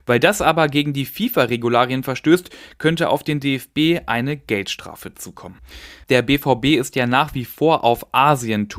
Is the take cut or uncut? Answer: cut